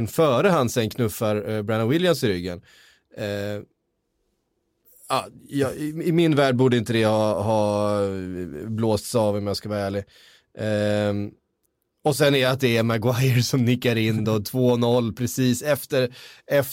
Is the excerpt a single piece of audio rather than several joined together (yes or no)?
yes